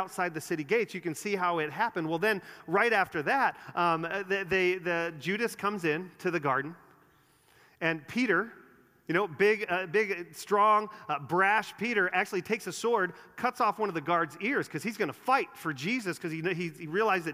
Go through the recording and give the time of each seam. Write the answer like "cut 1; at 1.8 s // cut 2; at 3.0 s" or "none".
none